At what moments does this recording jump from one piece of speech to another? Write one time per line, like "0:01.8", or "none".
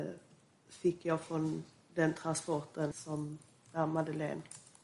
0:02.9